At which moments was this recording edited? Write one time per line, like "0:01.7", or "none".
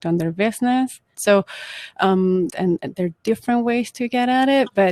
0:01.1
0:02.5